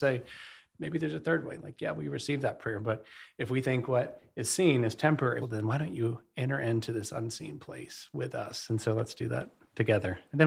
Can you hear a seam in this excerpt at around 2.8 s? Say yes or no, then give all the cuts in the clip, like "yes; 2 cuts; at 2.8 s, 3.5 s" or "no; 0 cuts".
no; 2 cuts; at 5.4 s, 8.7 s